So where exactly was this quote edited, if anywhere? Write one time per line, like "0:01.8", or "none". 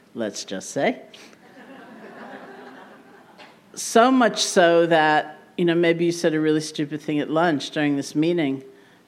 none